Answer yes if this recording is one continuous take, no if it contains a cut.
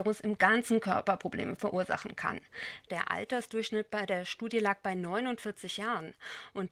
no